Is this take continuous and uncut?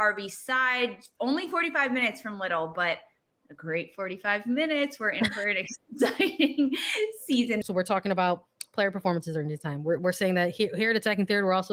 no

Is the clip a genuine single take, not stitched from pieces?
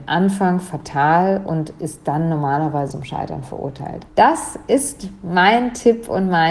no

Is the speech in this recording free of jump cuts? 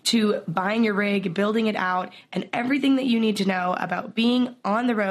yes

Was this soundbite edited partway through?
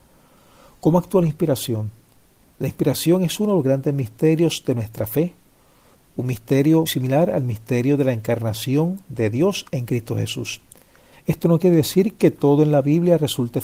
yes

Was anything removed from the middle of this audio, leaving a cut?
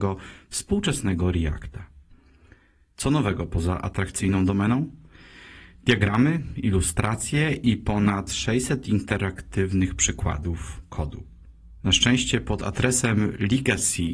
no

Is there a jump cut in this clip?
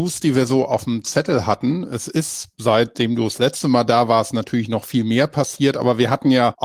no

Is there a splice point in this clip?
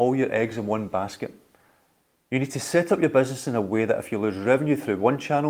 no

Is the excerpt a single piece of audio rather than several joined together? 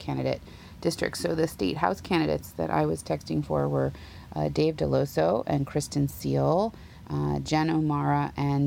yes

